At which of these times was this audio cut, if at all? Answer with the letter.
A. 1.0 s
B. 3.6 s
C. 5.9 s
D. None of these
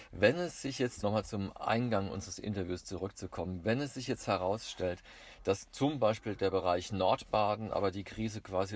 A